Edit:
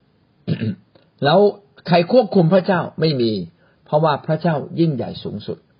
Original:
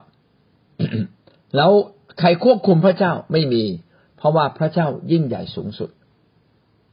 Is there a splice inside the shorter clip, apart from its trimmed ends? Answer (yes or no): no